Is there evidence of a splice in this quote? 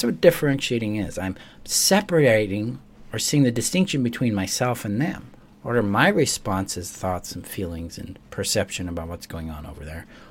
no; 0 cuts

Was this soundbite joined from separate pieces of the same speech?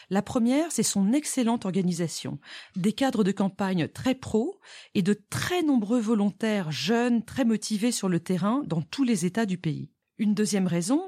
no; 0 cuts

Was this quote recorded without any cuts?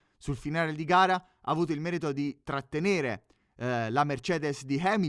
yes; 0 cuts

